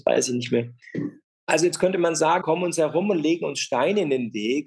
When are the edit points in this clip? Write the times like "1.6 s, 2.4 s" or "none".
1.2 s, 2.4 s

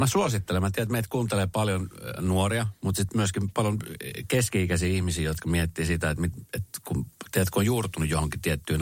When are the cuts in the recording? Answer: none

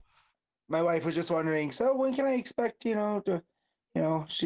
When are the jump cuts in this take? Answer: none

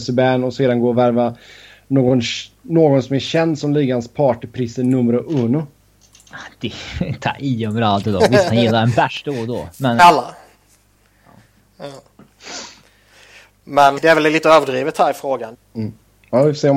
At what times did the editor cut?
10.0 s, 14.0 s, 15.5 s

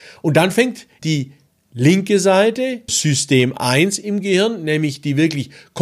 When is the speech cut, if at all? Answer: 1.0 s, 2.9 s

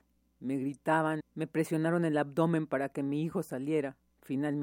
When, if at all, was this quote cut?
1.2 s

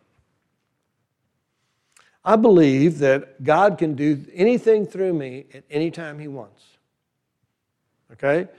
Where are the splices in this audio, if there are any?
none

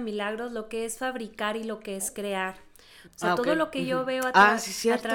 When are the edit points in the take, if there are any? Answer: 3.1 s

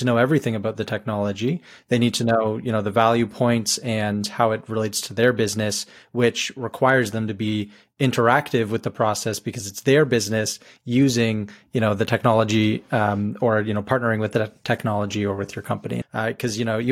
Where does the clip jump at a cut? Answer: 16.0 s

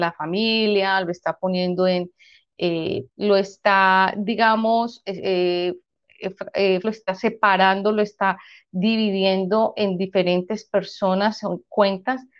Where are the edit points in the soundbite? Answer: 3.1 s, 6.8 s

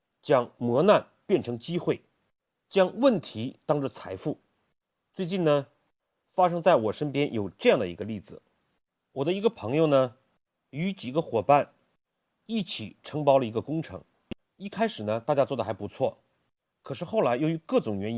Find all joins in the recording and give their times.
14.4 s

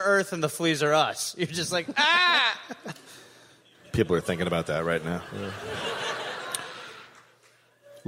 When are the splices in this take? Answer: none

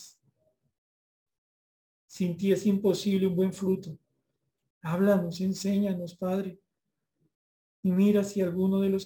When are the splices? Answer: 4.7 s

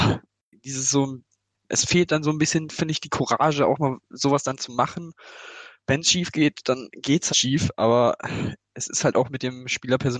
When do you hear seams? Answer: 7.3 s

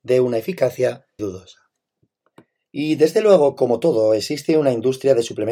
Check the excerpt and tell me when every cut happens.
1.2 s

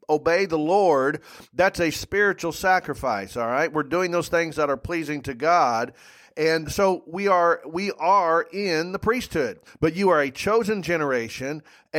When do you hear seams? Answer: 6.6 s, 9.7 s

